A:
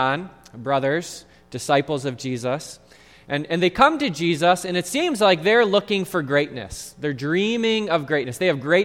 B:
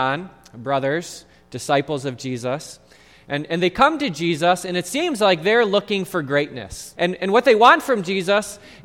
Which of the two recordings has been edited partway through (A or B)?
B